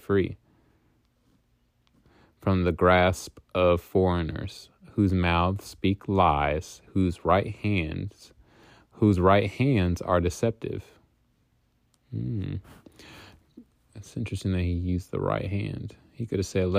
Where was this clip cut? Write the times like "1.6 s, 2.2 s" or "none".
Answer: none